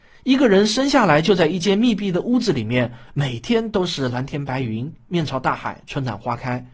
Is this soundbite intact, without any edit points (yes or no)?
no